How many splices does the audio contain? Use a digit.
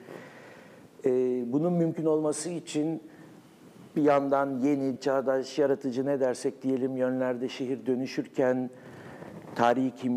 1